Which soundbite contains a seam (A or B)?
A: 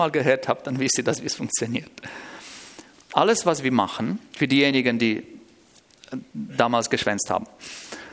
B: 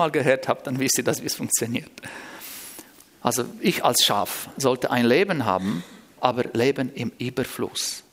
B